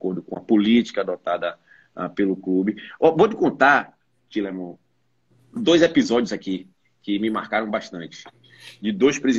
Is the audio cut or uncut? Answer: uncut